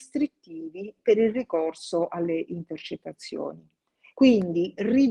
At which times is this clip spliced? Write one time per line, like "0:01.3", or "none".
0:04.1